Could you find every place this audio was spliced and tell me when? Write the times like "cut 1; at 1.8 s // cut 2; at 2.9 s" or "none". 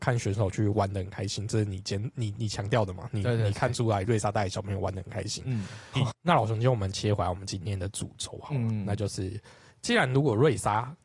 cut 1; at 4.0 s // cut 2; at 5.9 s